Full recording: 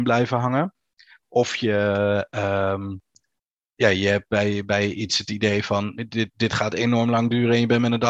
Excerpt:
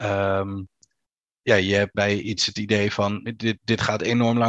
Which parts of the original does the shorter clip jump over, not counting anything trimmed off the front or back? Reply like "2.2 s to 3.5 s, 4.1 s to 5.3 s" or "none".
4.3 s to 4.7 s